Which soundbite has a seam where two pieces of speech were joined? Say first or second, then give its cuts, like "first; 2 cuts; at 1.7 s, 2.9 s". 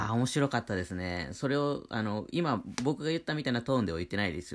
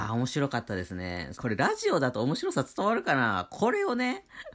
second; 1 cut; at 1.3 s